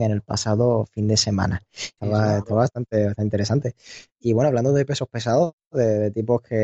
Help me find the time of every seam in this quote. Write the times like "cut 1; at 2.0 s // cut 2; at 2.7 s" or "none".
cut 1; at 2.0 s